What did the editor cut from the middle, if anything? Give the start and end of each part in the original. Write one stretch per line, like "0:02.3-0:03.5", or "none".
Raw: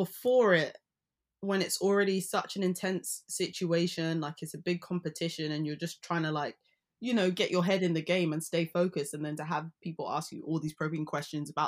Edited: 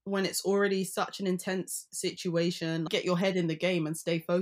0:04.2-0:07.3